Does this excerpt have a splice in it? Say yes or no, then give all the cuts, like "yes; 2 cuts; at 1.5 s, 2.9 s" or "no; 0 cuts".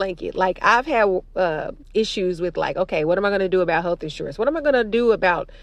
yes; 1 cut; at 1.8 s